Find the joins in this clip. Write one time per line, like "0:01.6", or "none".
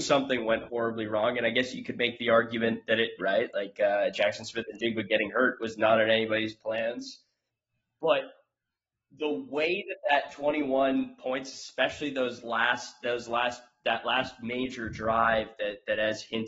0:03.2